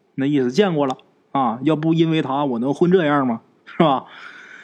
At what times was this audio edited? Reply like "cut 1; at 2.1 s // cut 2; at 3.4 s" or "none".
none